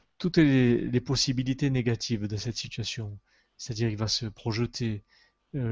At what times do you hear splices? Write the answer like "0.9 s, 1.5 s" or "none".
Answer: none